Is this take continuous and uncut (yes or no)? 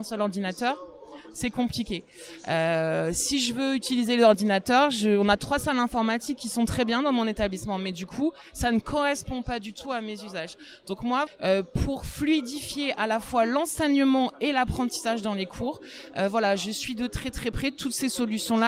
no